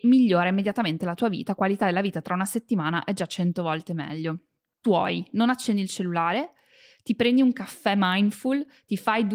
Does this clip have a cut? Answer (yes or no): yes